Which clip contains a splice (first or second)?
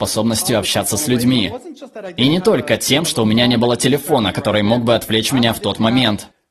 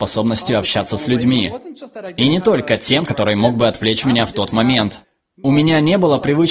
second